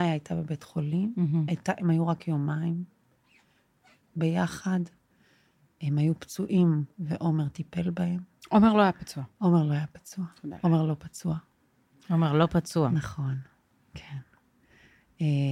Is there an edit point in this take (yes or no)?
no